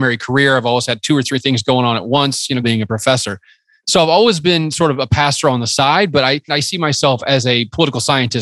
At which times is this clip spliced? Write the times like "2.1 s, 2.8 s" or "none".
2.6 s, 6.5 s